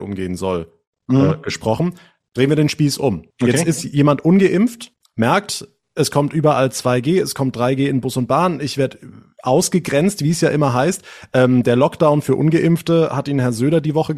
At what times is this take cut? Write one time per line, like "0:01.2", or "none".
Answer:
none